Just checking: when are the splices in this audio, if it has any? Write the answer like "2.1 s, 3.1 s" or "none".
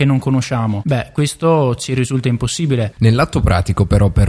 3.0 s